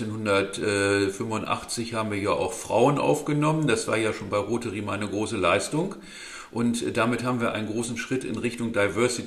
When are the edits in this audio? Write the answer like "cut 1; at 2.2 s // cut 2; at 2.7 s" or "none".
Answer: none